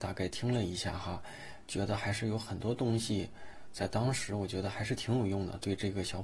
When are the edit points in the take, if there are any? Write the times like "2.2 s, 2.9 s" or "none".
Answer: none